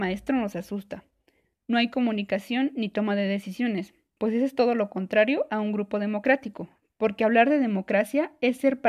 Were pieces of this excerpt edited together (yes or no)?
yes